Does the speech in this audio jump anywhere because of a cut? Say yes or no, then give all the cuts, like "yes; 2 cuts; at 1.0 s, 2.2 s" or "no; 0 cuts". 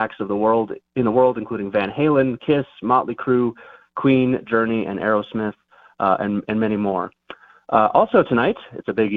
no; 0 cuts